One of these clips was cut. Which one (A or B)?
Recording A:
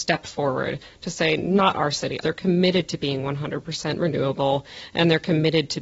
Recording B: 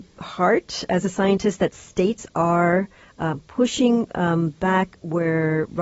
A